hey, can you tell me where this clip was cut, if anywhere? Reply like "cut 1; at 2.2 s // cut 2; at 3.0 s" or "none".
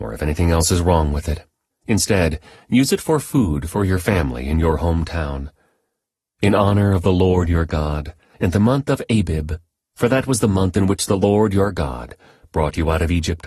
cut 1; at 1.7 s // cut 2; at 6.3 s // cut 3; at 8.3 s

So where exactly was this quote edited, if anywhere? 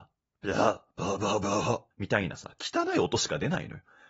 cut 1; at 1.9 s

